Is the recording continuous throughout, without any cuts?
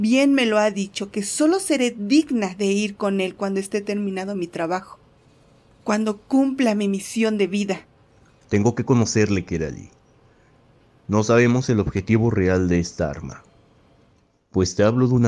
yes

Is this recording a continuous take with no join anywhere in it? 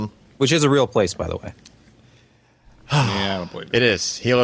yes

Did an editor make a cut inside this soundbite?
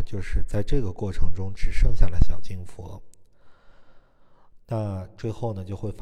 yes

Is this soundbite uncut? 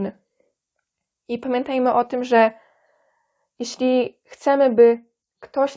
yes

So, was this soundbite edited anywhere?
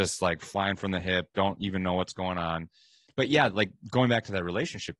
no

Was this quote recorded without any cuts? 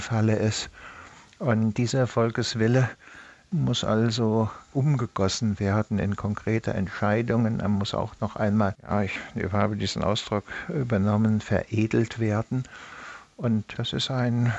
yes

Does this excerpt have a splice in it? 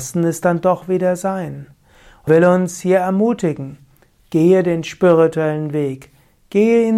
yes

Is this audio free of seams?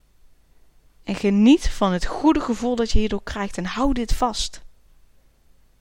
yes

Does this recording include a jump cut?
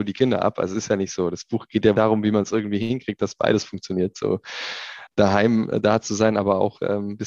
yes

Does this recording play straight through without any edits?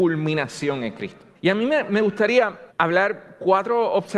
no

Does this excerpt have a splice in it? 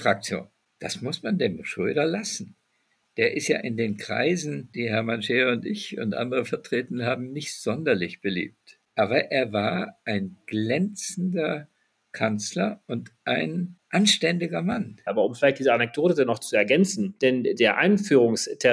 yes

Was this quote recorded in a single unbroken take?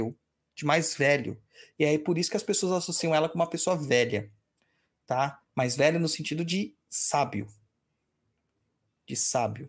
yes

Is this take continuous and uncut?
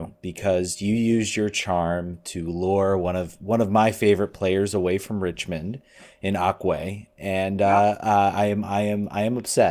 yes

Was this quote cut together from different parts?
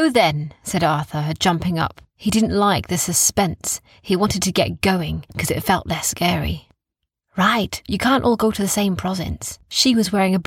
yes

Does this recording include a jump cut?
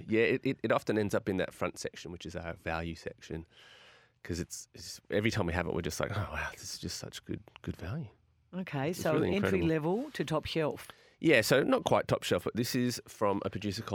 no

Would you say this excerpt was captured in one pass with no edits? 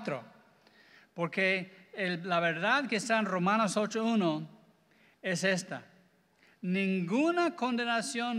yes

